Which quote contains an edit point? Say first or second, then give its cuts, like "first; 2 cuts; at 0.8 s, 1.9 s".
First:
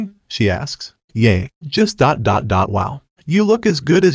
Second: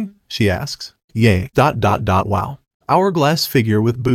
second; 2 cuts; at 1.5 s, 2.7 s